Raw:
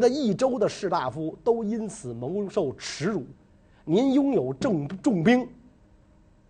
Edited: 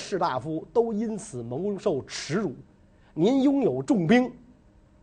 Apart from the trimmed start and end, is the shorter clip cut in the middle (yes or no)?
yes